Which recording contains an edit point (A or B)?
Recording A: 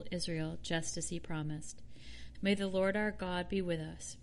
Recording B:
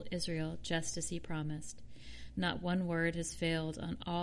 A